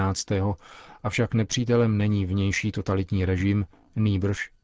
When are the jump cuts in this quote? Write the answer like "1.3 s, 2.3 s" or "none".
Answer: none